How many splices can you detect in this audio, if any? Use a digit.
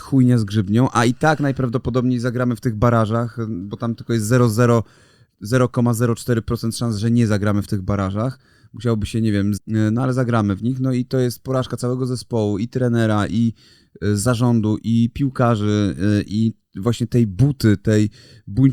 1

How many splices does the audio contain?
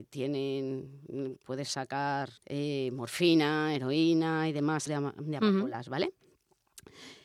2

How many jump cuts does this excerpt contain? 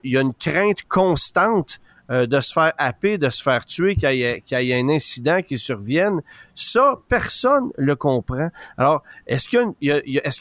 0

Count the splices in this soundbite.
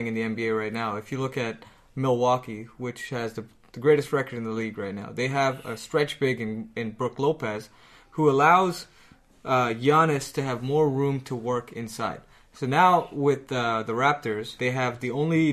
1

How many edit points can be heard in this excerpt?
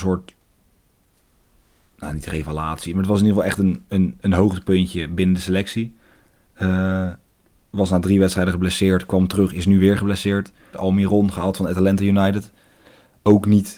1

